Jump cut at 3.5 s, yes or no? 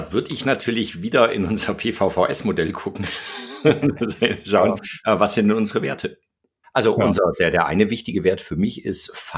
no